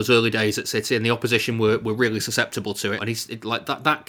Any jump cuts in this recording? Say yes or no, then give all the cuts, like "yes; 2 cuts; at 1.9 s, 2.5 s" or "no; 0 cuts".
yes; 1 cut; at 3.0 s